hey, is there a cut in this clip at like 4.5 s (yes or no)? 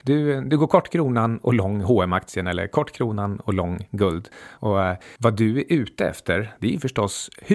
no